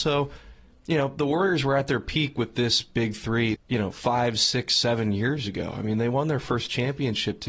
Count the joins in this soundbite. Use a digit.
1